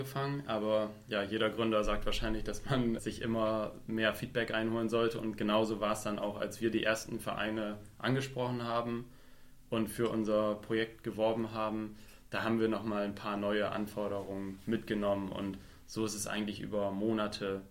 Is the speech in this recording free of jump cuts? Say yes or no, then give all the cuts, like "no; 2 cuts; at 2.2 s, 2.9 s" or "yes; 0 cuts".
no; 1 cut; at 3.0 s